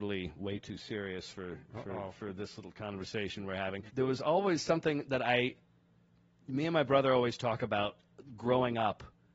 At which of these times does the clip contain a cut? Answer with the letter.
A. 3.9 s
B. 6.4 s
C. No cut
A